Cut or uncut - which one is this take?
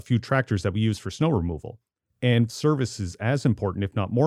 uncut